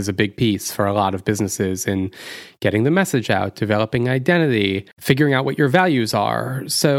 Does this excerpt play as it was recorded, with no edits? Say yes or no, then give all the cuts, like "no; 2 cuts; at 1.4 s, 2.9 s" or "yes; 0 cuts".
no; 1 cut; at 4.9 s